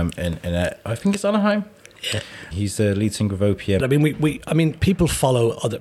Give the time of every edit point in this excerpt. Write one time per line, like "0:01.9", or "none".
0:02.5
0:03.8